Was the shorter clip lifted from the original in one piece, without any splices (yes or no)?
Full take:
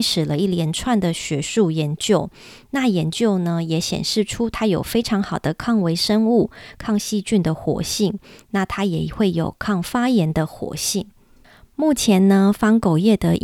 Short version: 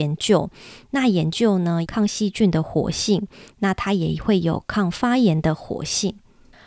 no